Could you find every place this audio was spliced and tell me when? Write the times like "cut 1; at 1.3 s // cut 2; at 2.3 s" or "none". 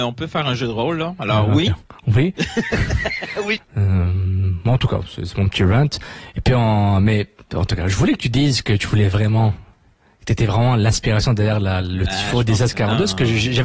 cut 1; at 3.6 s